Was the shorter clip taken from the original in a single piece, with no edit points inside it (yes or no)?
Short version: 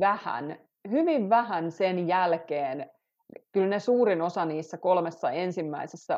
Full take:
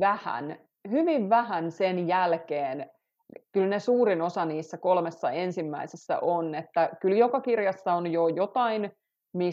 yes